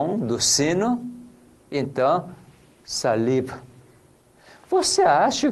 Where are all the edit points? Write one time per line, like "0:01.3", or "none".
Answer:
none